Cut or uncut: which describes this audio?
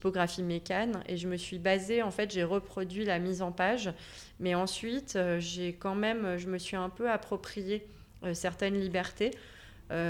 uncut